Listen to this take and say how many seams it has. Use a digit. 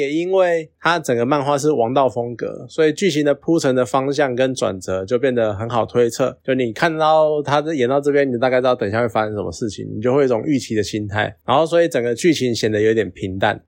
0